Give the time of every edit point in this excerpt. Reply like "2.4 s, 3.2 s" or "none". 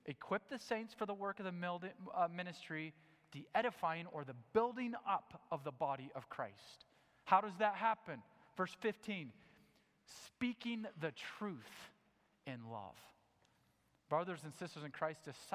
none